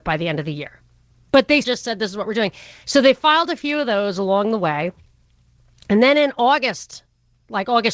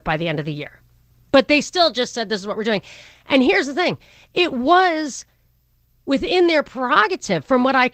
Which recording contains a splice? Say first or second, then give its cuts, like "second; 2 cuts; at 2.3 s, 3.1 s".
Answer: first; 2 cuts; at 1.6 s, 2.8 s